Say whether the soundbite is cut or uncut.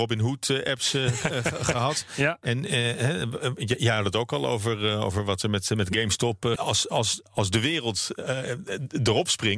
cut